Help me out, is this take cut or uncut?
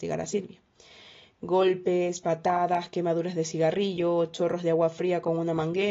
uncut